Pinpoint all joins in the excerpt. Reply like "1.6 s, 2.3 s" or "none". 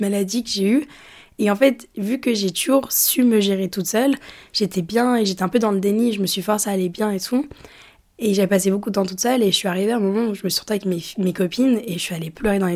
none